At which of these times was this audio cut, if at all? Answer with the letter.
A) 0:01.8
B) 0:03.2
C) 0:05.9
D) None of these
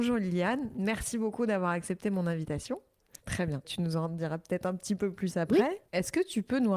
B